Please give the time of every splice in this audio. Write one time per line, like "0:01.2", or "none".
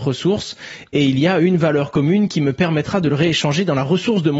none